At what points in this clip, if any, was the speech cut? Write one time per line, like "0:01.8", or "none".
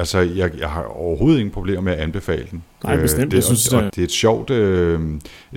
0:03.9